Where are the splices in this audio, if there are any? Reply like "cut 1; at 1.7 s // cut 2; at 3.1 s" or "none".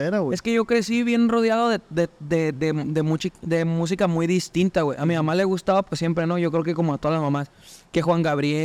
none